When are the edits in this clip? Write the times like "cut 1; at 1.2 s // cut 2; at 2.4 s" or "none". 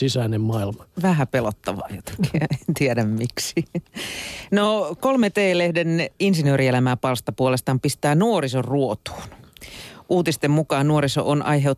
none